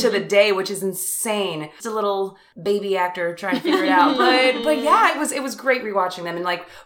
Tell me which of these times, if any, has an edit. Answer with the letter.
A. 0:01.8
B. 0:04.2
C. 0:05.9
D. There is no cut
A